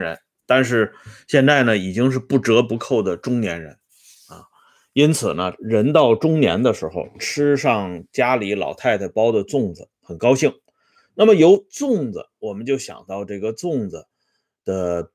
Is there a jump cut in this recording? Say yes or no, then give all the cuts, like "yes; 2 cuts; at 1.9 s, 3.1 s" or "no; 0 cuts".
no; 0 cuts